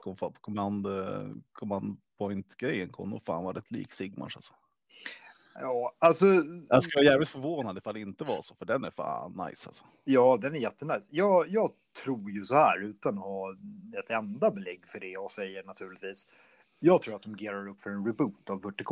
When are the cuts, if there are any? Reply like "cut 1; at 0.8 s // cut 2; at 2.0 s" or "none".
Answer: none